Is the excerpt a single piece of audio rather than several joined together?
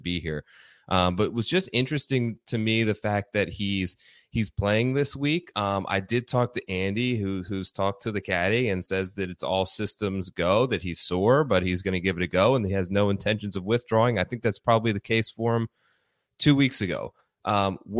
yes; 0 cuts

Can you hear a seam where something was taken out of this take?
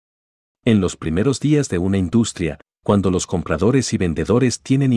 yes; 1 cut; at 2.7 s

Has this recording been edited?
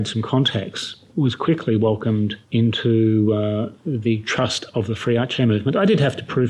yes; 2 cuts; at 1.1 s, 2.4 s

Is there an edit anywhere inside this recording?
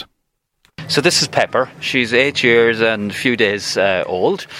no; 0 cuts

